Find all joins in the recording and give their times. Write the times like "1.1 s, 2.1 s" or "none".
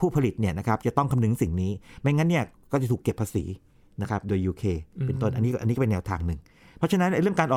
none